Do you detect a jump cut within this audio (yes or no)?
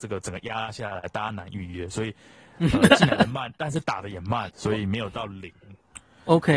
yes